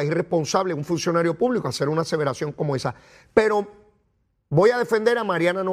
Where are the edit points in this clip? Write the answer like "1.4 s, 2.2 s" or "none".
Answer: none